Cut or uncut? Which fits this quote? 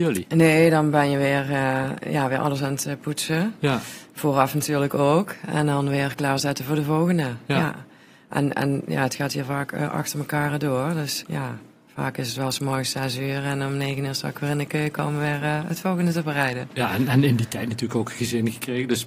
cut